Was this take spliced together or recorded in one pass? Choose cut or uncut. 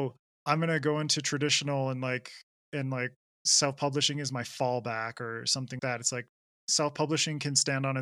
cut